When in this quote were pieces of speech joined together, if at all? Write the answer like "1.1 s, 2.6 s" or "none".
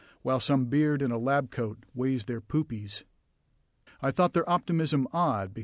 3.9 s